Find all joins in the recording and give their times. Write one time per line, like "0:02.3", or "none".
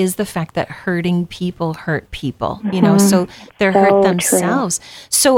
none